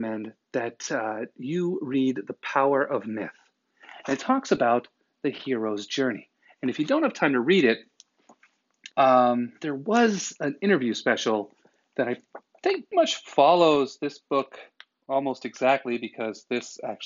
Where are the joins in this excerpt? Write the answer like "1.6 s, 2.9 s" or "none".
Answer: 8.9 s, 12.9 s